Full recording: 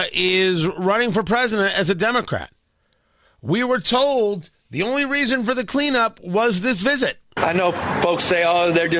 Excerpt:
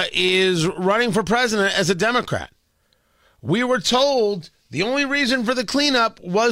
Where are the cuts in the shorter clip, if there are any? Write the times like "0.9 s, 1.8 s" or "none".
none